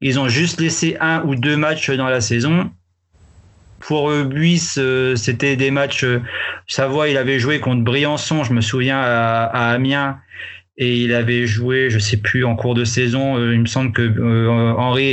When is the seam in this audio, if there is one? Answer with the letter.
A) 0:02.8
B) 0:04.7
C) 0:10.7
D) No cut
D